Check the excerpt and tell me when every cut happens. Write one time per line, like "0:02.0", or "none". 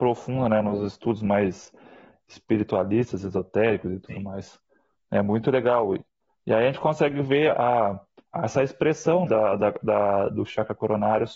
0:09.3